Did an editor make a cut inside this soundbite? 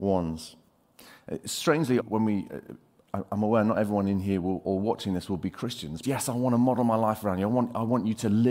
yes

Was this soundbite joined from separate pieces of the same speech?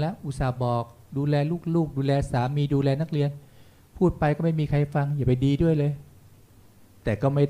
no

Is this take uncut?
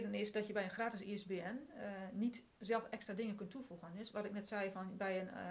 yes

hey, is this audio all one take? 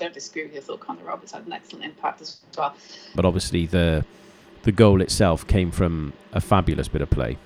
no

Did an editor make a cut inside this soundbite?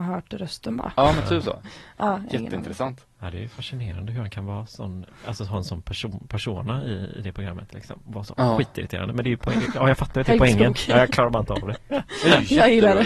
no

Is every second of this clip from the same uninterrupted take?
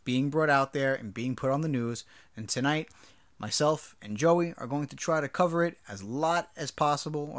yes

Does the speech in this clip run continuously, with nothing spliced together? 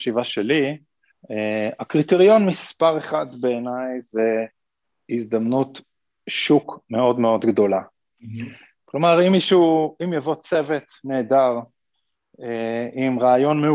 yes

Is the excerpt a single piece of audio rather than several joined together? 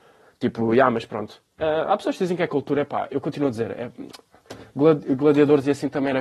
yes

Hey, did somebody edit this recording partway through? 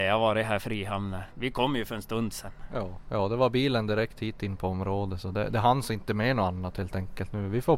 no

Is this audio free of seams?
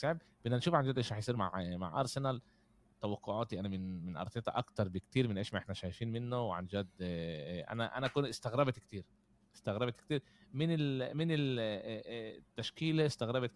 yes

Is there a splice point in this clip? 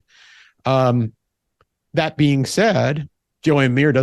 no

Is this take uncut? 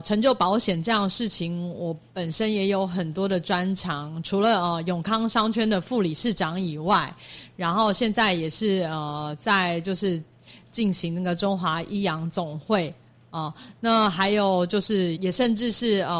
no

